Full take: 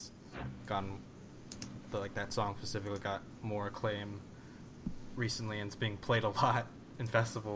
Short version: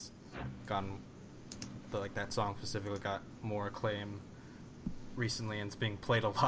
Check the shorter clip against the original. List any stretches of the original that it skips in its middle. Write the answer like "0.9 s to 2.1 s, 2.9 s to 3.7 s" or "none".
none

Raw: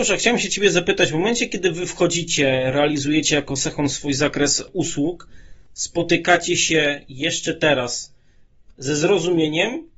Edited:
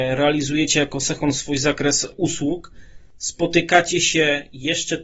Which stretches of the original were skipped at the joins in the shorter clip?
none

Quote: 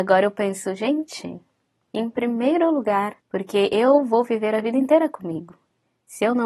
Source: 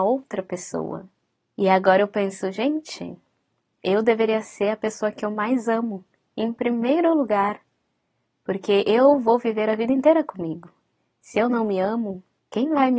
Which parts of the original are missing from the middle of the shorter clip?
3.6 s to 6.3 s, 7.6 s to 8.4 s

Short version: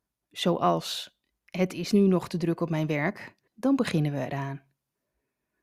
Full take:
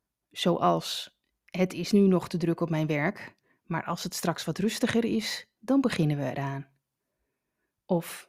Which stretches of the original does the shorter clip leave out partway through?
3.5 s to 5.5 s

